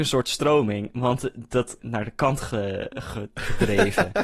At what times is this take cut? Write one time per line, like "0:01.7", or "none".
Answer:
0:01.8